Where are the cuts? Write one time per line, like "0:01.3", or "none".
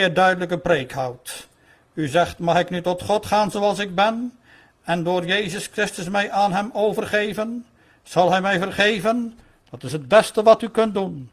0:09.6